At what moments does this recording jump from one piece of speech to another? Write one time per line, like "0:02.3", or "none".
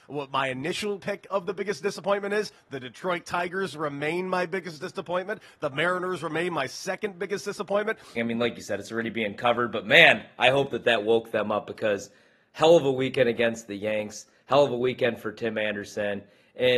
0:08.2